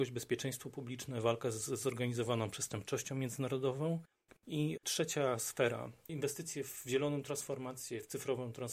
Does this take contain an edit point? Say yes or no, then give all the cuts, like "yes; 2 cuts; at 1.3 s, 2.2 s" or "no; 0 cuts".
yes; 2 cuts; at 4.4 s, 6.1 s